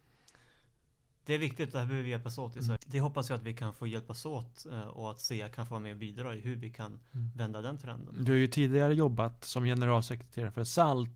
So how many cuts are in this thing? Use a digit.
1